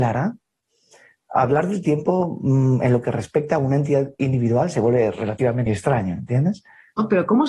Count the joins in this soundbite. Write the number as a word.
one